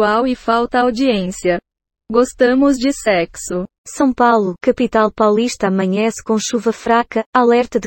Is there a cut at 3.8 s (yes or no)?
yes